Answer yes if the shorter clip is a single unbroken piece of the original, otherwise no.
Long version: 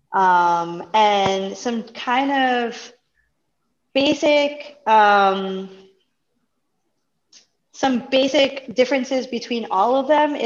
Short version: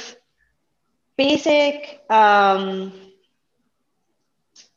yes